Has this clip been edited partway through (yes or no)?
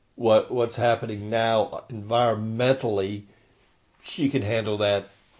no